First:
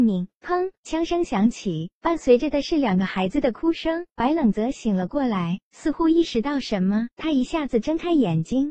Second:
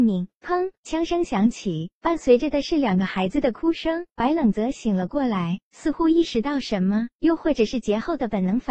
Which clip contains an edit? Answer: first; 1 cut; at 7.1 s

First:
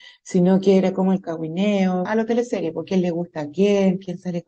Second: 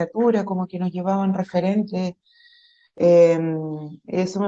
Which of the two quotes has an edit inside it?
first; 1 cut; at 2.0 s

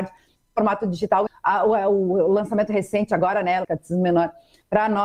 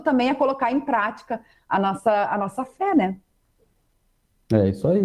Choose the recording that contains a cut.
first; 2 cuts; at 1.3 s, 3.6 s

